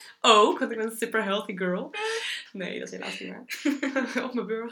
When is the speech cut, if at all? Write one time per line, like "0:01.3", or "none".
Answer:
none

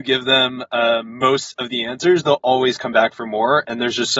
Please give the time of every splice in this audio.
none

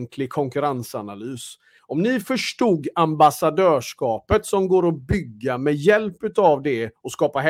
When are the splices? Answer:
0:01.8

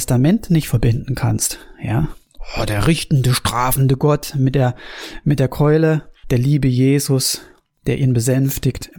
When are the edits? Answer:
0:06.2

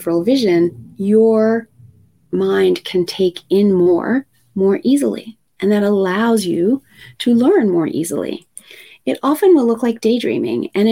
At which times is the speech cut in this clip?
none

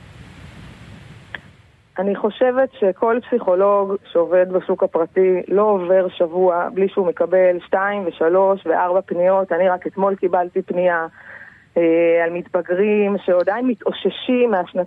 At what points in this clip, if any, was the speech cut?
none

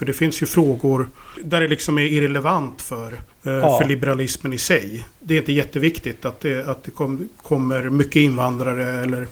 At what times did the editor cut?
none

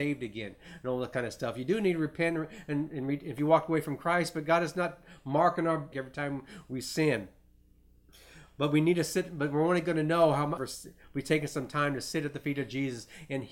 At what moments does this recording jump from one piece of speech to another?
0:05.9
0:10.6

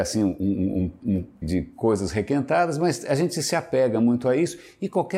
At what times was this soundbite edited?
0:01.4

